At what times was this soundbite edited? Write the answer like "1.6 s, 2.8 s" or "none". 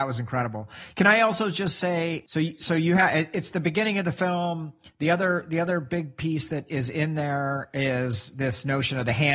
none